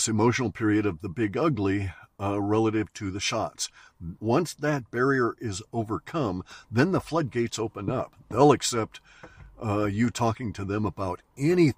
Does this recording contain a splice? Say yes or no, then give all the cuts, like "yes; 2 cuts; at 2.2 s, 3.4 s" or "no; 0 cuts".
yes; 1 cut; at 4.2 s